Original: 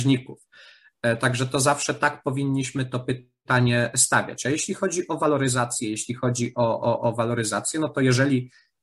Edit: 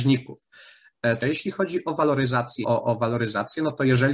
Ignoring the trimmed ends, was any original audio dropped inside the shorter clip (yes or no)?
yes